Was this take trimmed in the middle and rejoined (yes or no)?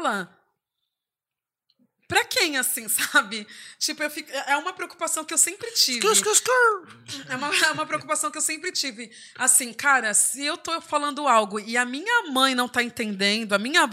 no